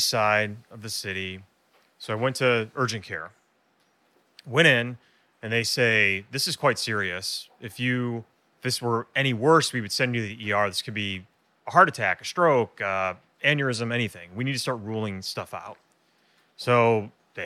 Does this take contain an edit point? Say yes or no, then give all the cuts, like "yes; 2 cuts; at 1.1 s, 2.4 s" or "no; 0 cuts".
no; 0 cuts